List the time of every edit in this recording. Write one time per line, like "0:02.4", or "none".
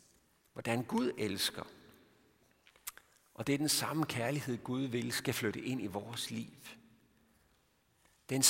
none